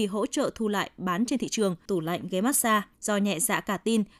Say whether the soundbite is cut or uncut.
cut